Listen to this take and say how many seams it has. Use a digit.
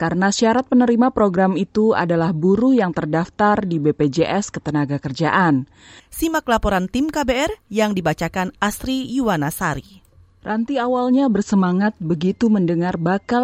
1